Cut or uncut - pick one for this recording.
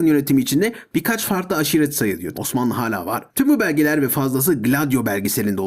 cut